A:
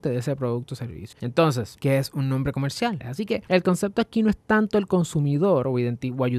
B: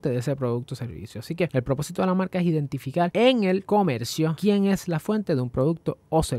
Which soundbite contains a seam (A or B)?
A